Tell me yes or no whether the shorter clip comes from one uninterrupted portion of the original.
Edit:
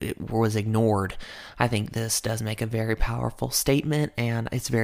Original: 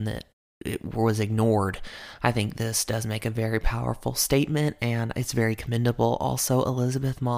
yes